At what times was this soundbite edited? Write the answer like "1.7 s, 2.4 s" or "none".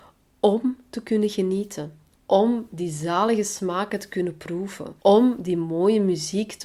2.1 s, 5.0 s